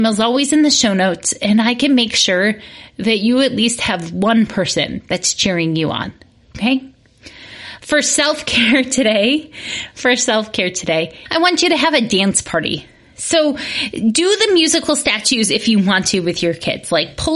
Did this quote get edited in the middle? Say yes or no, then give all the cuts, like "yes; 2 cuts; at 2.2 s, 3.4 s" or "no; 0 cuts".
no; 0 cuts